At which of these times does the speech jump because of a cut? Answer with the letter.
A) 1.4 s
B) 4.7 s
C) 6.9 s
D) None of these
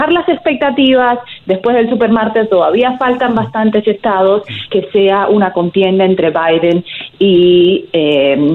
B